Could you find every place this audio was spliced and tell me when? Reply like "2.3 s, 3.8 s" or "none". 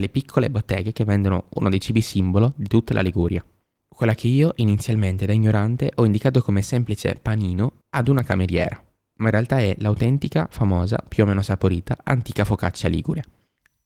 none